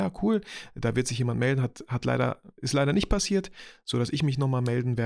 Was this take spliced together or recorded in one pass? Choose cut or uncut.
uncut